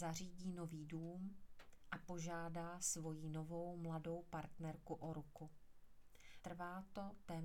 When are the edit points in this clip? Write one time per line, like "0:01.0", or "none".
0:06.4